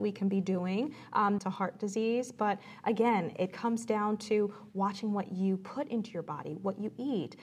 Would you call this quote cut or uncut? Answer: cut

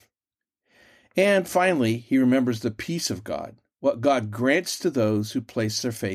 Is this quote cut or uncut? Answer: uncut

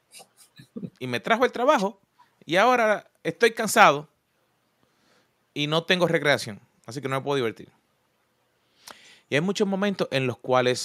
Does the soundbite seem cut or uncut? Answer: uncut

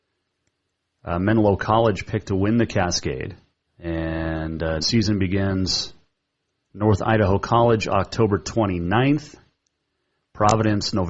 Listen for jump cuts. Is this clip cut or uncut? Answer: cut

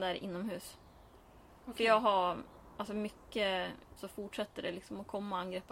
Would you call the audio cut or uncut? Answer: cut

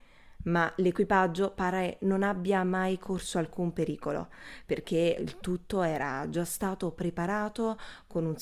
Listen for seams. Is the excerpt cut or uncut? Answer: cut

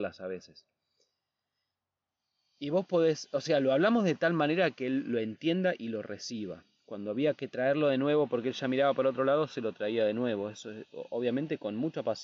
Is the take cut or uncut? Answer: uncut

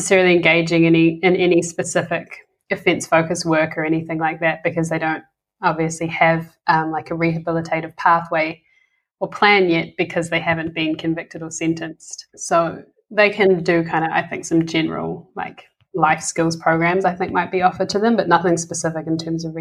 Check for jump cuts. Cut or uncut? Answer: uncut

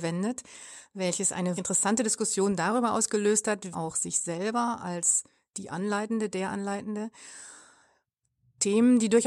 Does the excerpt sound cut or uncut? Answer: cut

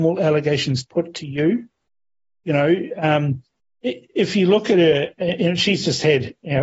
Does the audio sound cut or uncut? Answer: uncut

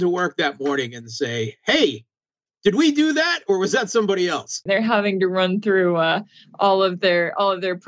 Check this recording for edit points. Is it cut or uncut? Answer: cut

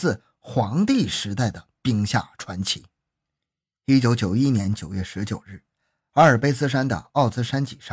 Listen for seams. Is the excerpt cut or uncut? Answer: uncut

